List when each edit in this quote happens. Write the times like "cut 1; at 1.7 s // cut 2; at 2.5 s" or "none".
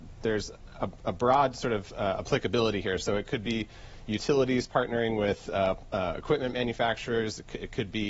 none